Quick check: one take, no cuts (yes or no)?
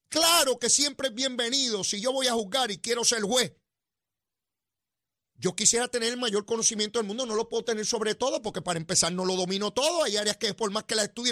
yes